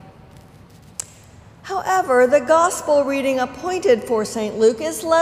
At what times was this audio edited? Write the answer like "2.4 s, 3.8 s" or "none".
none